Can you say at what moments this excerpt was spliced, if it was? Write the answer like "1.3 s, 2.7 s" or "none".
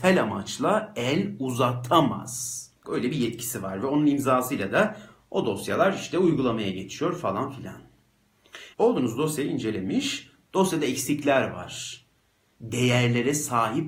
2.8 s, 8.7 s, 12.6 s